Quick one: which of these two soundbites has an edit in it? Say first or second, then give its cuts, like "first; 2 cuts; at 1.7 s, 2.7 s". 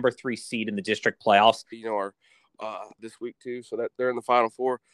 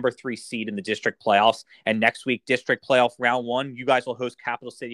first; 2 cuts; at 1.7 s, 3.0 s